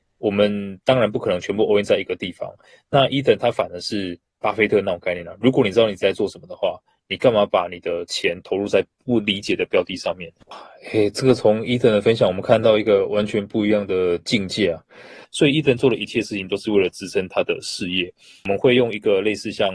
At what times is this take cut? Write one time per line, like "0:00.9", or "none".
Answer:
0:10.4
0:15.2